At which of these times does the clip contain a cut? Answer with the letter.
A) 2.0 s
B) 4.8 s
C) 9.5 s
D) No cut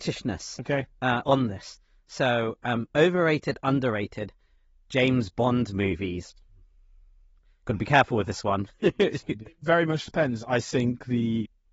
C